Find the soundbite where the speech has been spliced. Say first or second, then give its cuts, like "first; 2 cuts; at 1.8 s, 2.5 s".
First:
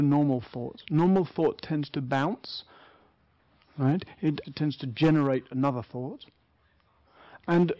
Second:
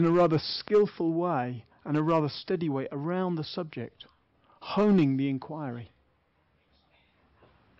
first; 1 cut; at 4.4 s